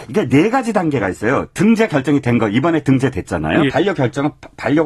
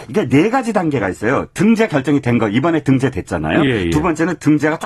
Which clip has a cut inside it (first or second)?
first